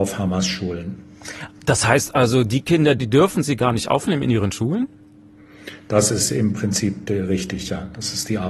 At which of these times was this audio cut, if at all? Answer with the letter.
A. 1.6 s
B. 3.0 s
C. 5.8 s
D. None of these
B